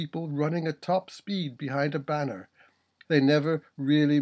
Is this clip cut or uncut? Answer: cut